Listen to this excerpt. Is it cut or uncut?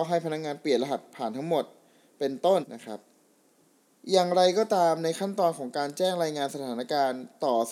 cut